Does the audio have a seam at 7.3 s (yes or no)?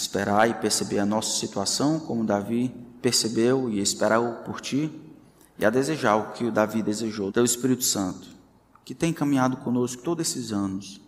yes